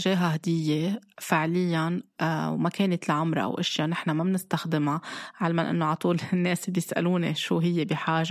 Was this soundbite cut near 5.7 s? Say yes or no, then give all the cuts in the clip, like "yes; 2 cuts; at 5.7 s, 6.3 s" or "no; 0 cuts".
no; 0 cuts